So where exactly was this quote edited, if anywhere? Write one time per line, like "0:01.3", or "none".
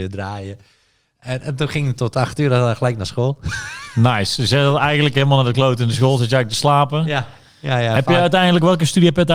none